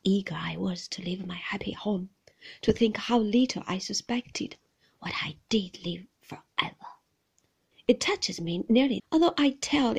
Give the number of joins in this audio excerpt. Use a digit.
2